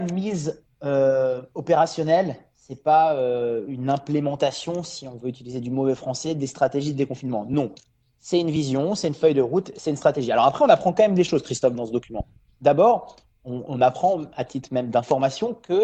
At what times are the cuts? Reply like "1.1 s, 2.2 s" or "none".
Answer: none